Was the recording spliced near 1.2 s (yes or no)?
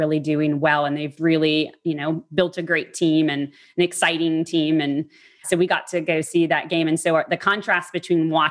yes